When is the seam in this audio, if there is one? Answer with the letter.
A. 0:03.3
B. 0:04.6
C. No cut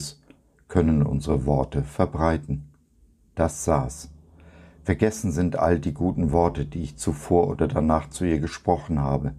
A